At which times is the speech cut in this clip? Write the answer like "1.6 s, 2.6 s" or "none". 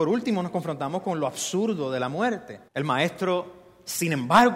2.7 s